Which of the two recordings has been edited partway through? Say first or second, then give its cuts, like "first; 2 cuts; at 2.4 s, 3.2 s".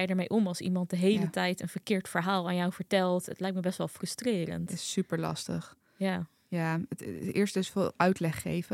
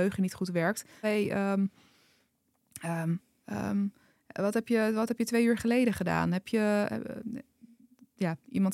second; 1 cut; at 1.0 s